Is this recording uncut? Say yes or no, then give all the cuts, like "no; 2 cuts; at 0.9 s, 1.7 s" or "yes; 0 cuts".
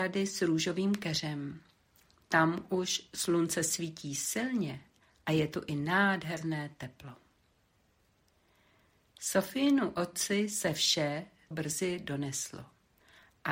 no; 1 cut; at 11.5 s